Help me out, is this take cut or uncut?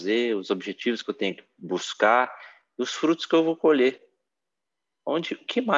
uncut